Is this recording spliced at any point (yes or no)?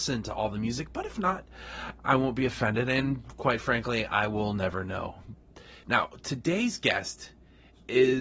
no